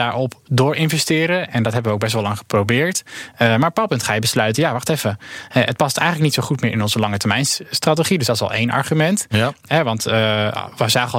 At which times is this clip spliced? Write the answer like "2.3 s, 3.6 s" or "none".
none